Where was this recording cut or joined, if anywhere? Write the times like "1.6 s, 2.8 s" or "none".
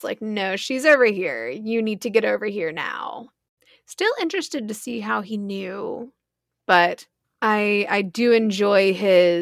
none